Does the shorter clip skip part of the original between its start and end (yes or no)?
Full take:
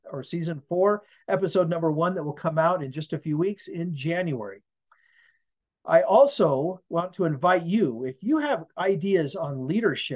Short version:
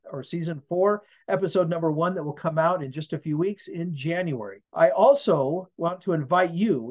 yes